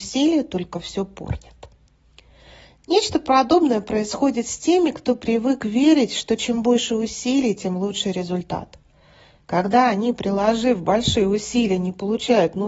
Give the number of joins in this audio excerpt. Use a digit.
0